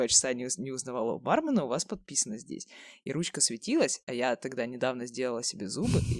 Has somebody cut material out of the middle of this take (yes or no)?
no